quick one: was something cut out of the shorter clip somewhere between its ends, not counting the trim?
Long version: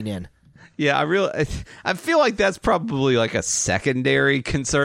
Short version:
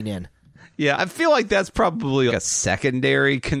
yes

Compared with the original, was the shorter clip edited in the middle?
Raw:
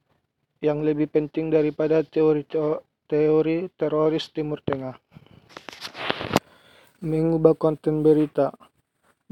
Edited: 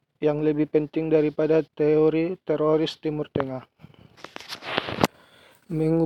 yes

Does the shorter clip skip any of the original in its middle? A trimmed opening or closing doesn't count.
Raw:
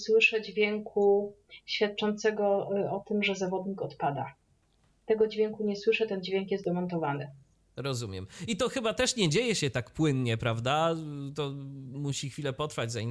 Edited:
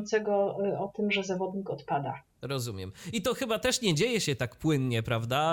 yes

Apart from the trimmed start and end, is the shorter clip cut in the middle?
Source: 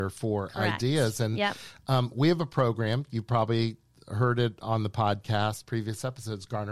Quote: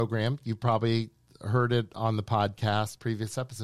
no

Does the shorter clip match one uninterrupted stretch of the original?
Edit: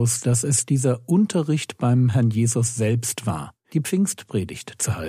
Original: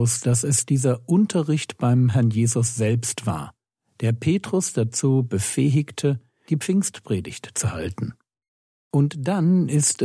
no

